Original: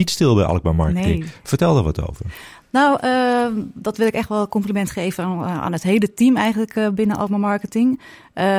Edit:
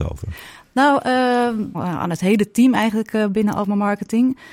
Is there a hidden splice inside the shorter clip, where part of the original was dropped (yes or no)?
yes